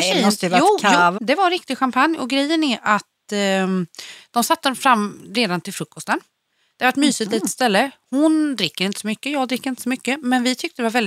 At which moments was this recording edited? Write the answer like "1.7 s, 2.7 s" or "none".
1.2 s